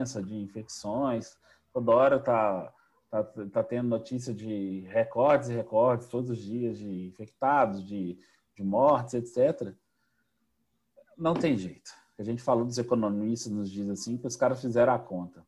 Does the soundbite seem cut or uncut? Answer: uncut